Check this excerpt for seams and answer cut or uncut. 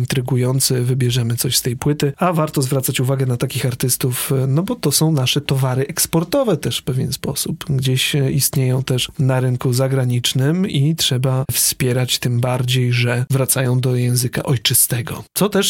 uncut